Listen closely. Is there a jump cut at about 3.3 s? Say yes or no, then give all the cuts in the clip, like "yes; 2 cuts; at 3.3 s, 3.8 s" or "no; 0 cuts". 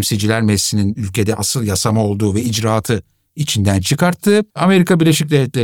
no; 1 cut; at 4.5 s